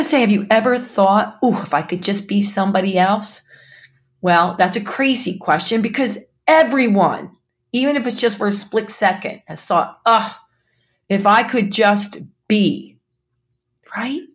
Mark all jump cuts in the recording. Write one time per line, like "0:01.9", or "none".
none